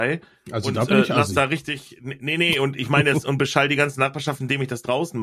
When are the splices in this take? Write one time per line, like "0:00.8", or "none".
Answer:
none